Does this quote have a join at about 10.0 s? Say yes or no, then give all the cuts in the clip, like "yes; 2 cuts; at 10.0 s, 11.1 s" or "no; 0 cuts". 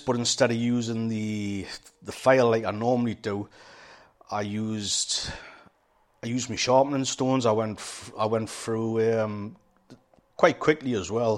no; 0 cuts